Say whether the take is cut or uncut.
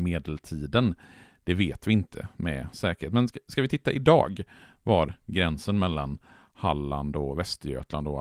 uncut